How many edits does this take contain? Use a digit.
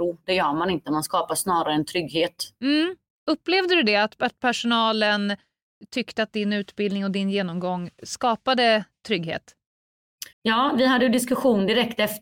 1